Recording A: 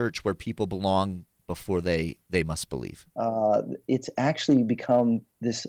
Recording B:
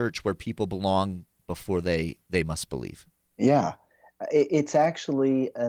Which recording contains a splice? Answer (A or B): A